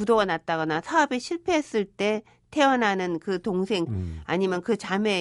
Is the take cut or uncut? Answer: cut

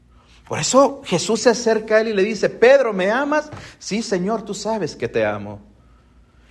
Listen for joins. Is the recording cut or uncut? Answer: uncut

